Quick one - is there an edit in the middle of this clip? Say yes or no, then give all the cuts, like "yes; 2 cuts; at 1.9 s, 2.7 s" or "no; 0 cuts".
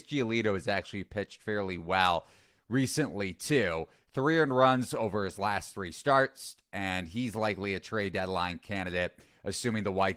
no; 0 cuts